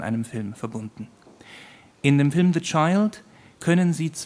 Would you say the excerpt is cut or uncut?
uncut